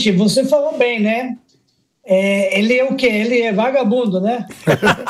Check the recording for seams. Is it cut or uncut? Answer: uncut